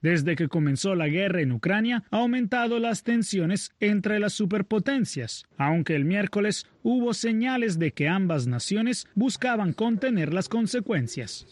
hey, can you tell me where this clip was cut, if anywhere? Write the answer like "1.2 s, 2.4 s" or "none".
5.5 s